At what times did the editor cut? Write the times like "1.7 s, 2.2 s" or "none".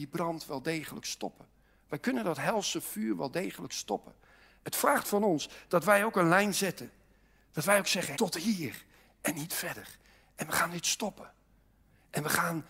8.1 s